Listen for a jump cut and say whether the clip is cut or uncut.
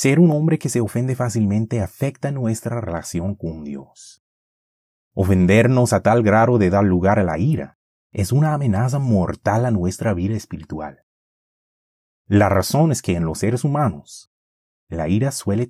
uncut